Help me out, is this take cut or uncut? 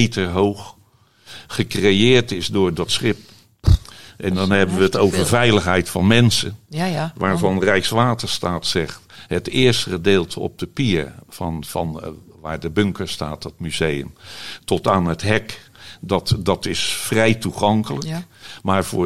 uncut